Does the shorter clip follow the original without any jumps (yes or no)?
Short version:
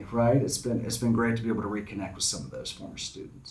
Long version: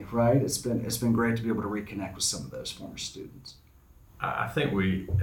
yes